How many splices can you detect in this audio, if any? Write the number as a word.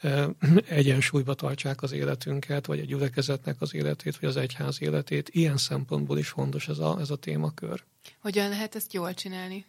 zero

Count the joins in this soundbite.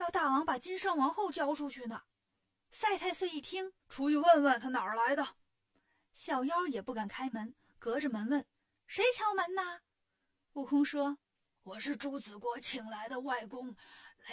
one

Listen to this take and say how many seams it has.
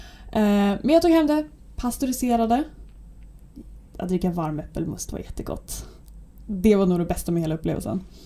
zero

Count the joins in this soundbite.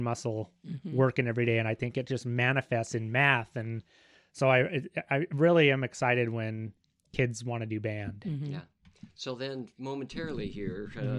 zero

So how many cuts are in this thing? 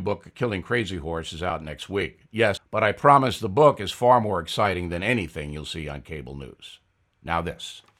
one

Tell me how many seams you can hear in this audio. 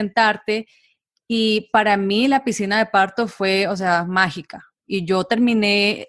one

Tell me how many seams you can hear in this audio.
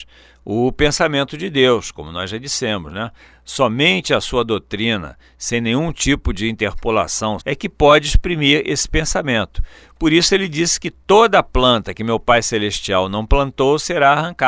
one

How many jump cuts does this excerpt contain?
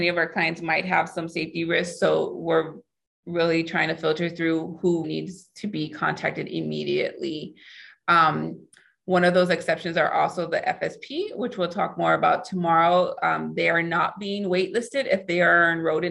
one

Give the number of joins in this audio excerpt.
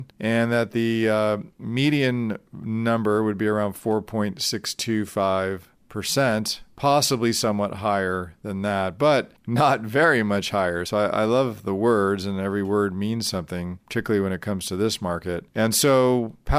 zero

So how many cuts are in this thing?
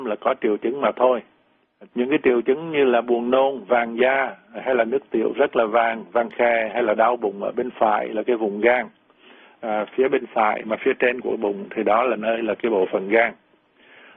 one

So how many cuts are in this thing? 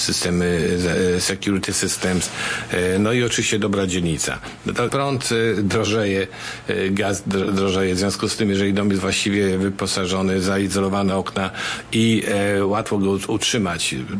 one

